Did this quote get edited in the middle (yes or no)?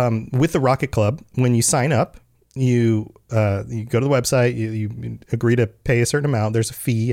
no